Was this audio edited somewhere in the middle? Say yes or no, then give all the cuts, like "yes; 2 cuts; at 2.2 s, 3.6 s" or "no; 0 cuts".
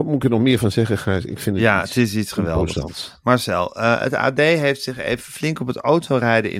no; 0 cuts